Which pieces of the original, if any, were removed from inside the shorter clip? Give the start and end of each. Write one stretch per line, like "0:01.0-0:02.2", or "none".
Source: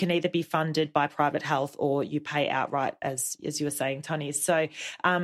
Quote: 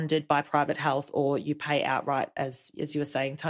none